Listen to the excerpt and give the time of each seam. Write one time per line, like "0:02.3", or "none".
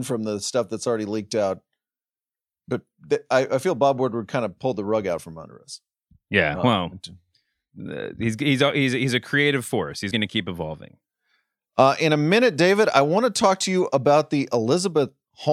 0:10.1